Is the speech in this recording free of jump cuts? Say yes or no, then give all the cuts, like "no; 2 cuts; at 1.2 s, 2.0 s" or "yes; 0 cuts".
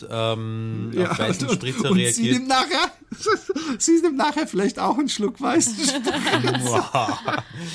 yes; 0 cuts